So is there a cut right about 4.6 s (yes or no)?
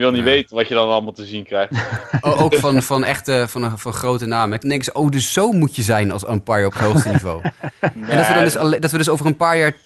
yes